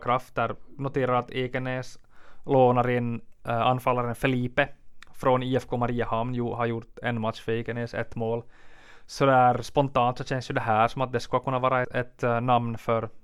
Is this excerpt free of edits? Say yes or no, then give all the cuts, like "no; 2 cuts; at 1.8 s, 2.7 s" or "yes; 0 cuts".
no; 1 cut; at 11.8 s